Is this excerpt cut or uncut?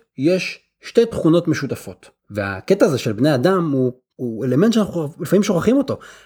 cut